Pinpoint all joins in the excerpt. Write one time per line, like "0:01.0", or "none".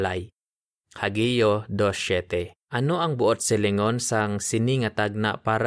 0:02.6

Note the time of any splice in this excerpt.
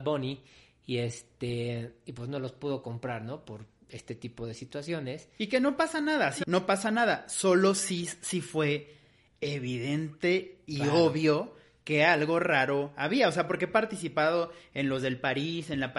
0:06.4

